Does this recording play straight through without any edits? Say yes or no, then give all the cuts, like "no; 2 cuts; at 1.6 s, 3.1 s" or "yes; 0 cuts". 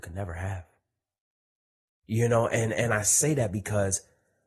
no; 1 cut; at 1.9 s